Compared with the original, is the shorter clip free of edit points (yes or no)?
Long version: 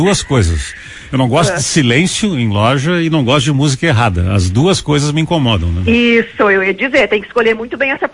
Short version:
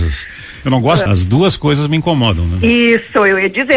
no